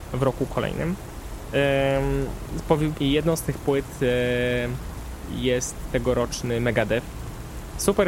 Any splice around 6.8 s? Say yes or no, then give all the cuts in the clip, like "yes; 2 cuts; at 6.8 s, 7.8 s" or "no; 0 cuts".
no; 1 cut; at 3.0 s